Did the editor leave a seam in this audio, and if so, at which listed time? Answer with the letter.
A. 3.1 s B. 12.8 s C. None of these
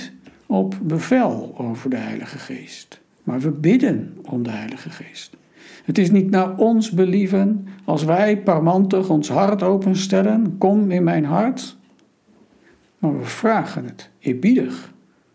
A